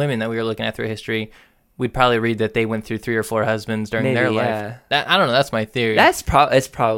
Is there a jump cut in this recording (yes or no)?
no